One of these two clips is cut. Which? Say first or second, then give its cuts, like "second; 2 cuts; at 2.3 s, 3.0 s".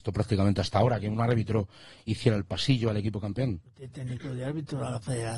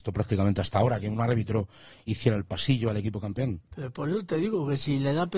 first; 1 cut; at 3.7 s